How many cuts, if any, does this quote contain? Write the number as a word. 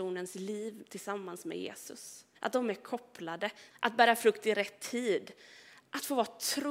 two